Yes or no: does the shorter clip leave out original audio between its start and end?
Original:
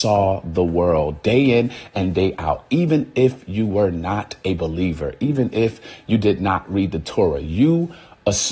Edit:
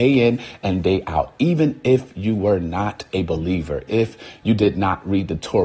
yes